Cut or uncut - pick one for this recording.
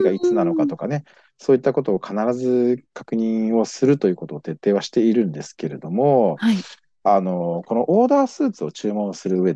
uncut